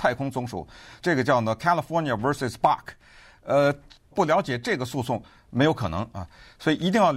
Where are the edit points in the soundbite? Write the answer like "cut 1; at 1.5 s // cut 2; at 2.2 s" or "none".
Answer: cut 1; at 1.0 s // cut 2; at 4.1 s